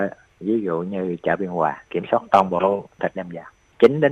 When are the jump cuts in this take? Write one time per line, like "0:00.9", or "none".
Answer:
0:01.9